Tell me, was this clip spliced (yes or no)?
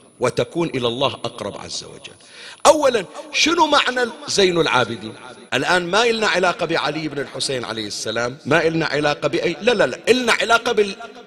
yes